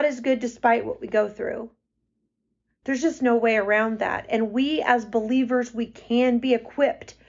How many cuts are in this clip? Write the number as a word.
zero